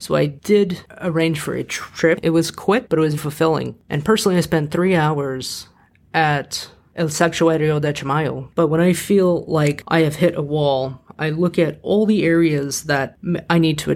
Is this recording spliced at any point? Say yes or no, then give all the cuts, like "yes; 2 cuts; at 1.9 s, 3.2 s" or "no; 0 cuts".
yes; 2 cuts; at 3.2 s, 8.5 s